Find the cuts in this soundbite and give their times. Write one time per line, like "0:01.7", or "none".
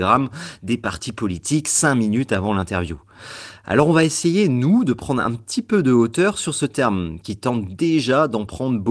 none

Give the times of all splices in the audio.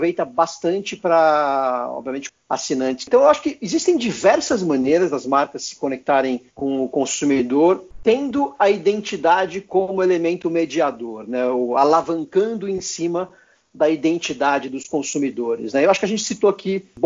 0:02.3

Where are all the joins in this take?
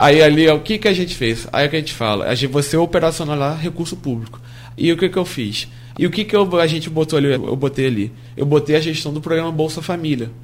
0:04.7
0:05.9
0:07.3

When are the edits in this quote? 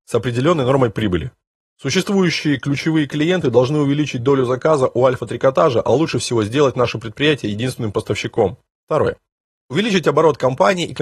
0:01.6
0:08.8

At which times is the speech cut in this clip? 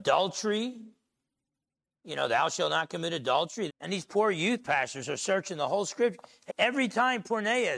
0:03.7
0:06.5

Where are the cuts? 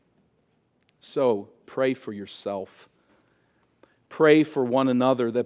0:01.6

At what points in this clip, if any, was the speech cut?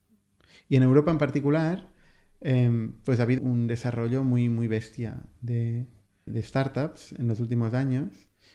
0:03.4
0:06.3

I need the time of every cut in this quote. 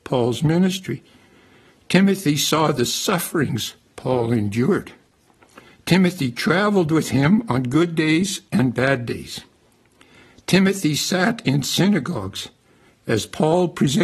none

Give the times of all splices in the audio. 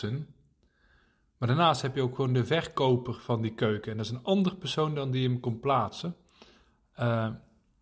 none

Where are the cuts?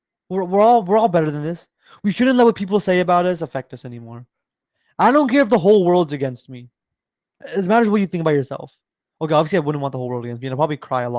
none

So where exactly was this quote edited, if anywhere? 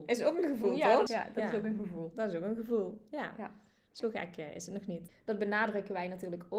0:01.1
0:05.1

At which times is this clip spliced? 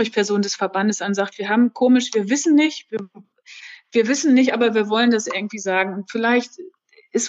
none

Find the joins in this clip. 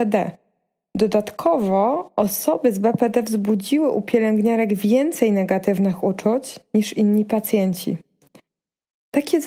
none

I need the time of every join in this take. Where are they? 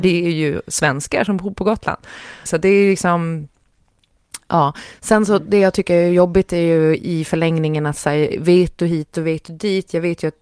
0:02.5

